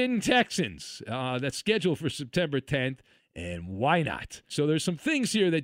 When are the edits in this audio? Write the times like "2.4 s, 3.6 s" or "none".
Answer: 3.2 s, 4.5 s